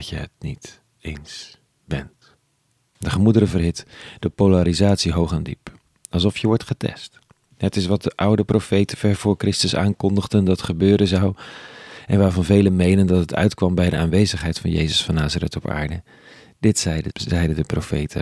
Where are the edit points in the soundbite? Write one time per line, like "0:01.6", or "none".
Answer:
0:03.0
0:17.1